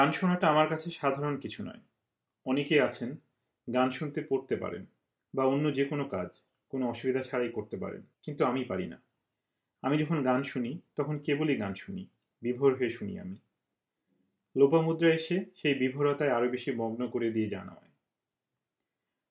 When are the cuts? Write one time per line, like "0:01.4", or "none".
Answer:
0:04.0
0:08.1